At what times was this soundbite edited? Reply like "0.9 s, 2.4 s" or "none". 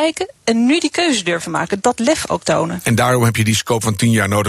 none